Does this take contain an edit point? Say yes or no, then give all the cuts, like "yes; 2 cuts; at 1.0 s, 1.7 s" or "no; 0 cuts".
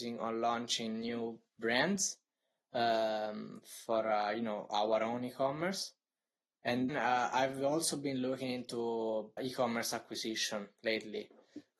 yes; 2 cuts; at 6.9 s, 9.4 s